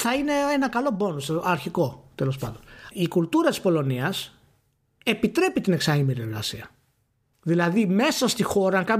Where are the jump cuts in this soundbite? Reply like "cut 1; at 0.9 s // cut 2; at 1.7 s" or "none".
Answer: cut 1; at 2.9 s // cut 2; at 7.3 s